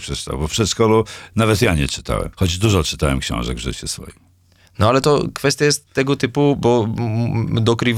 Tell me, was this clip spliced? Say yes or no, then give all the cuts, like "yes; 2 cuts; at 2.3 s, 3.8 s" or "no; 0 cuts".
yes; 1 cut; at 2.3 s